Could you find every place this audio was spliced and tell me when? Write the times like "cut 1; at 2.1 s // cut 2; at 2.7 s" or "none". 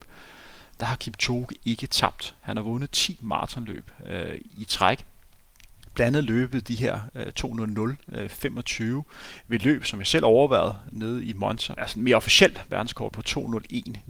cut 1; at 11.7 s // cut 2; at 13.1 s